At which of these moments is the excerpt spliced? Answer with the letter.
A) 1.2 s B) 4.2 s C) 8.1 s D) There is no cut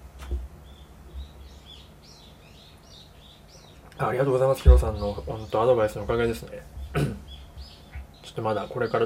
C